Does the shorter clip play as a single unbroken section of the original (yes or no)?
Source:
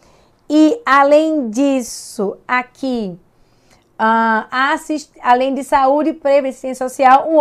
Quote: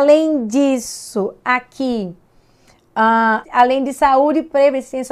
no